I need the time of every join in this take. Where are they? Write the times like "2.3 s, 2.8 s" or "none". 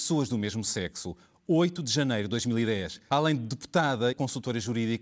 3.1 s, 4.1 s

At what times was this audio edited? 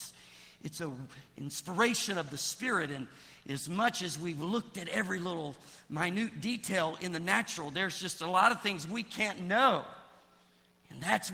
none

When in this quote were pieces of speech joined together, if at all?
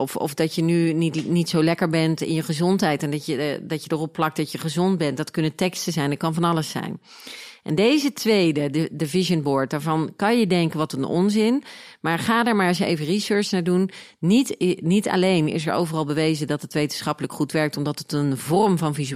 none

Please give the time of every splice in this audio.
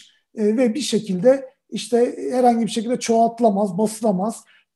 none

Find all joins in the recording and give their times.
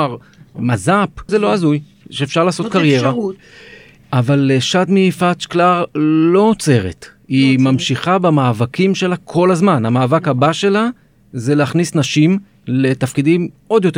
1.3 s

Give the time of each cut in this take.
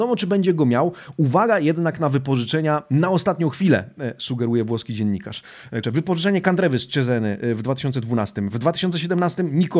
5.8 s

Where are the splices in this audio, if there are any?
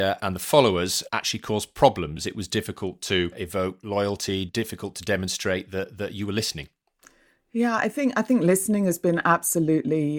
none

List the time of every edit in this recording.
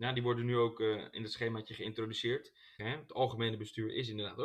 2.8 s

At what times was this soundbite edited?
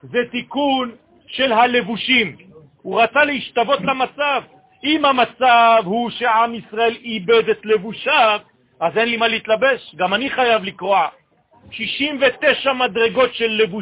2.8 s, 11.5 s

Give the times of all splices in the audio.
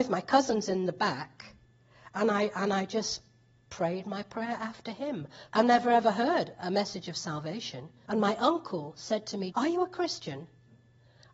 5.5 s, 8.1 s, 9.5 s

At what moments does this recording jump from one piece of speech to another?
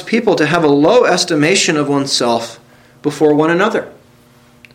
none

